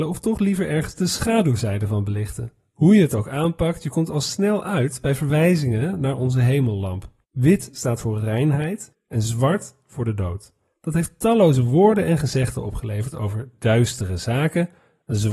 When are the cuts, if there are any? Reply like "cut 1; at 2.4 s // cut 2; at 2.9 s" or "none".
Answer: cut 1; at 8.9 s